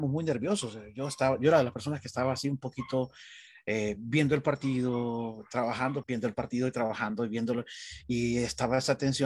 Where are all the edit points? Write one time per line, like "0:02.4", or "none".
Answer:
0:06.0